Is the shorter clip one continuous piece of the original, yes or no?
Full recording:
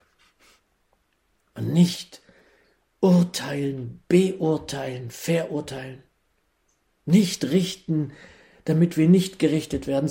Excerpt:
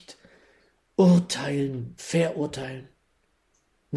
no